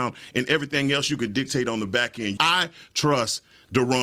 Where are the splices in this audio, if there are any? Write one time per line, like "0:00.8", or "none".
0:02.4